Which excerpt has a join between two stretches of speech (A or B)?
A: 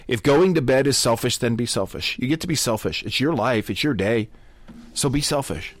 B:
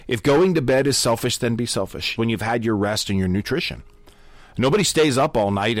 B